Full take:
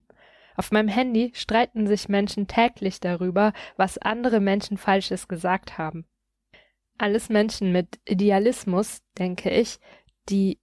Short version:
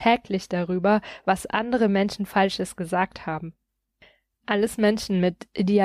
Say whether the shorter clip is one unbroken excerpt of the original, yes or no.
yes